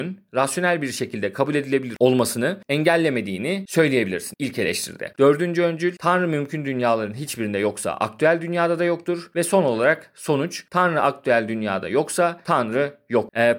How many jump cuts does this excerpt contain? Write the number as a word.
one